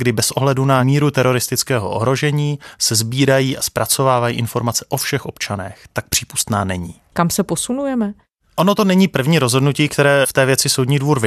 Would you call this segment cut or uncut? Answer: cut